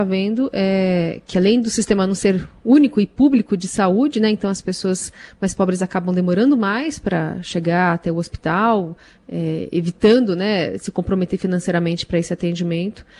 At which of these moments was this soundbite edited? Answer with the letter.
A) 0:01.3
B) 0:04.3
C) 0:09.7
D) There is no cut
D